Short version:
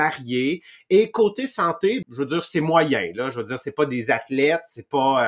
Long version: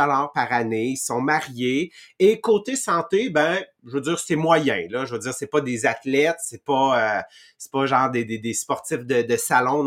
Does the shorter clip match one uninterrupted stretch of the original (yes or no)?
no